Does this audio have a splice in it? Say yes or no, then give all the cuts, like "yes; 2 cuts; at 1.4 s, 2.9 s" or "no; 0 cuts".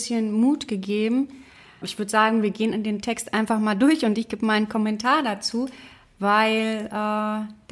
no; 0 cuts